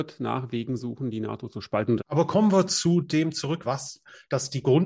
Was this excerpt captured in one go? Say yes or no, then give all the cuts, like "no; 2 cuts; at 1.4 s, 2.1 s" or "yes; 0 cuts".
no; 2 cuts; at 2.0 s, 3.6 s